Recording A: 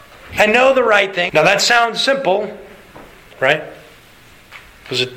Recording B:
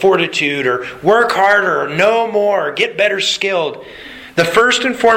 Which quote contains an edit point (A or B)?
A